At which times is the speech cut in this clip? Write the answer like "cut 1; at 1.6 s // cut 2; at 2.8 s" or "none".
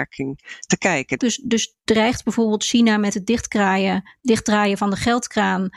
cut 1; at 1.2 s